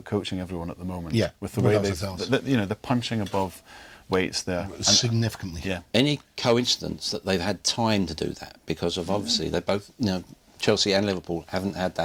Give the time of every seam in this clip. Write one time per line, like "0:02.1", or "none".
none